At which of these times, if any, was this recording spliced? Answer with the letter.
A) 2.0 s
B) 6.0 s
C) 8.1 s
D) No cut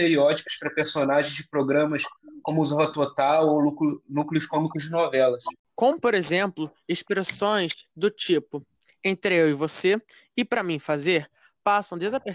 D